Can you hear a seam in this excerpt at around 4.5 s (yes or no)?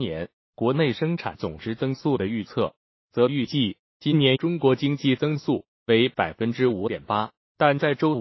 no